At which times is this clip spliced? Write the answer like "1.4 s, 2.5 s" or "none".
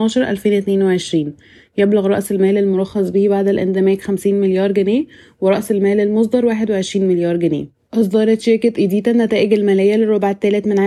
7.9 s